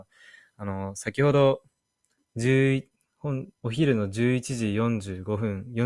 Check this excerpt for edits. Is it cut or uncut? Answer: cut